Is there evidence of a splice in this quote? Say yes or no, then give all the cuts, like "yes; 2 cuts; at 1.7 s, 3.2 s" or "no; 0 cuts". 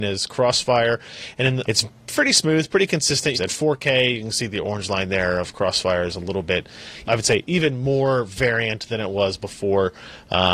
yes; 3 cuts; at 1.6 s, 3.3 s, 7.0 s